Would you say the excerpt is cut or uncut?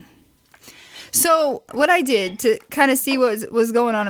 cut